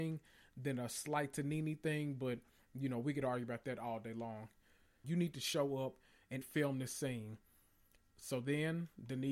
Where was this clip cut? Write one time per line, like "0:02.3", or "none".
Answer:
0:05.0
0:06.4